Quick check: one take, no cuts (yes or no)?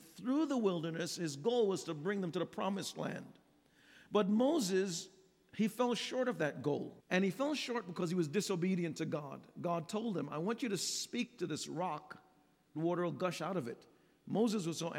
no